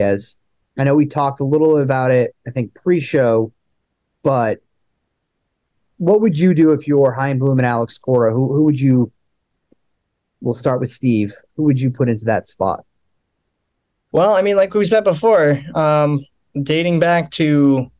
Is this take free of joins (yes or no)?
no